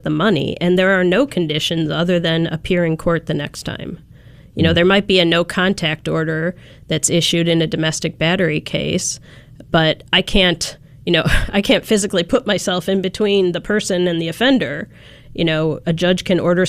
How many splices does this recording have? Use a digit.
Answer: 0